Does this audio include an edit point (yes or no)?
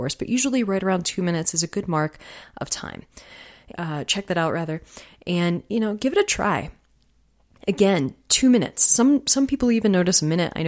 yes